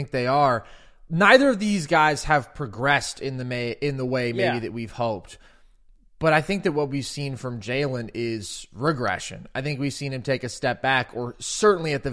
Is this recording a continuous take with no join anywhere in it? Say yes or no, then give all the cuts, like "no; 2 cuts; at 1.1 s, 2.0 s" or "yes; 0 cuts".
yes; 0 cuts